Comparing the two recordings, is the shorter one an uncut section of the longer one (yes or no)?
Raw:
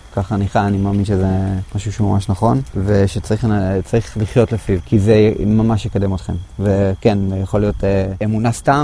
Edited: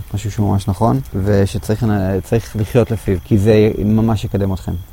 yes